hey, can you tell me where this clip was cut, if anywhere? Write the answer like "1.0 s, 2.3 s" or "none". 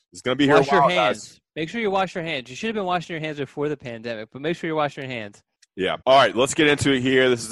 6.0 s